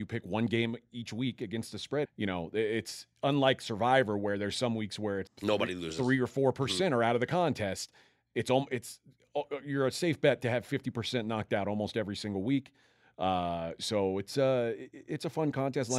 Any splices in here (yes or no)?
yes